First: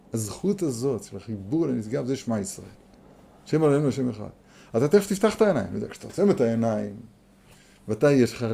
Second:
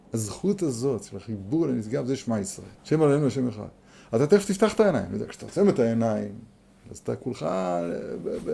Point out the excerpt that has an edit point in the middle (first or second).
second